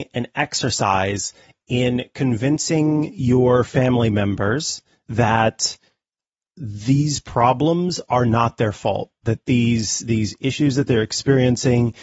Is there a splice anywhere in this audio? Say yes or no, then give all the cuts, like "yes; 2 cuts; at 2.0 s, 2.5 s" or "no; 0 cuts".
no; 0 cuts